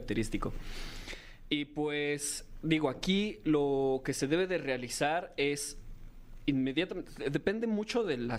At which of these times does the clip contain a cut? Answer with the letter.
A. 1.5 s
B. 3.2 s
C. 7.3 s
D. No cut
D